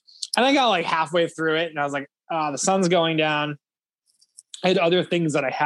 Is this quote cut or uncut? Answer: uncut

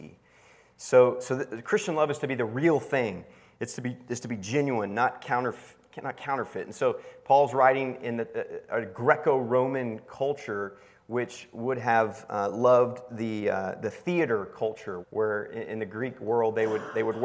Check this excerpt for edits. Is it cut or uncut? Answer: cut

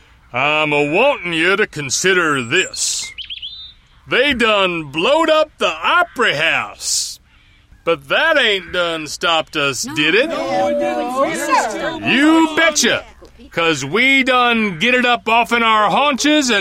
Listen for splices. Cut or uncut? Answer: uncut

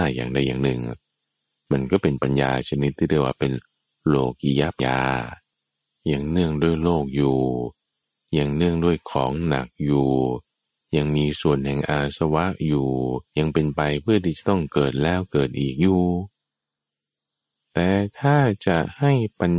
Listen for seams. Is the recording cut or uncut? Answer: cut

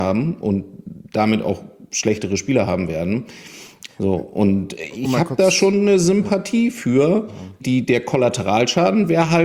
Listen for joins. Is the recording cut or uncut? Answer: cut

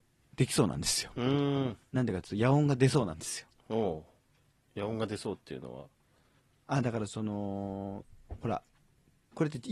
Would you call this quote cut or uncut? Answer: uncut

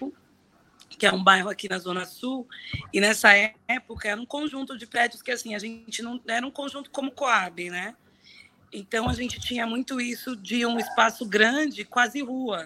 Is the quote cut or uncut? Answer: uncut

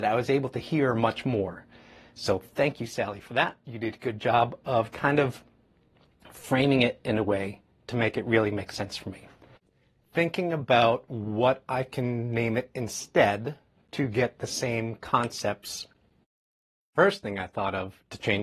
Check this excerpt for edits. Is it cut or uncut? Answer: uncut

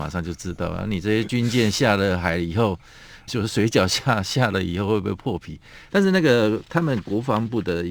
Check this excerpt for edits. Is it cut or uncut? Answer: cut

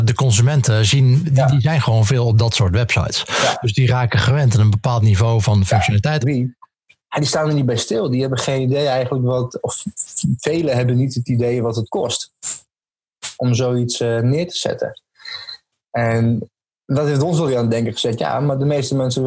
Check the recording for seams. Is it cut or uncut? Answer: cut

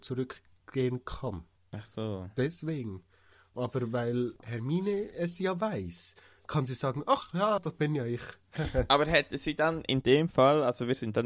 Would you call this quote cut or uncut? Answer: cut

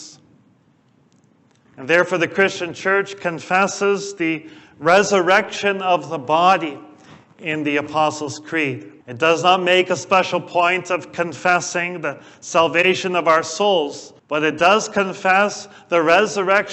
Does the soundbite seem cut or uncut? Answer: cut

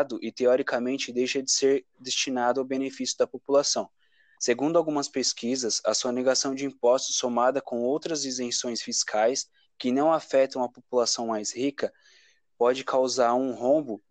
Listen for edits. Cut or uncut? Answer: uncut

